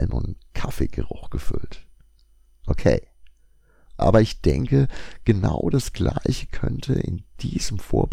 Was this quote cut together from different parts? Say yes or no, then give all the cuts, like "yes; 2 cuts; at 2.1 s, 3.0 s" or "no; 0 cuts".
yes; 1 cut; at 4.0 s